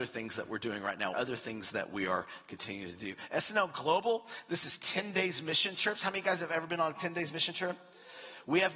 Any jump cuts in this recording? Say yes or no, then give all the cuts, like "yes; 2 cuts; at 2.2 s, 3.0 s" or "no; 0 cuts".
yes; 1 cut; at 1.1 s